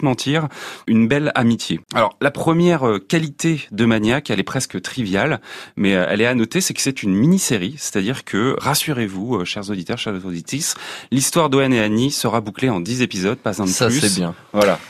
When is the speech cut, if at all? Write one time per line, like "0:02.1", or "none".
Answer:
0:08.6